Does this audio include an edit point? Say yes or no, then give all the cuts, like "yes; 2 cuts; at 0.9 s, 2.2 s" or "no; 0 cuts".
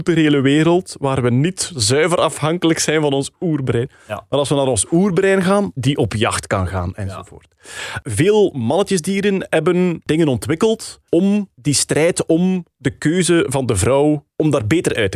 yes; 1 cut; at 5.8 s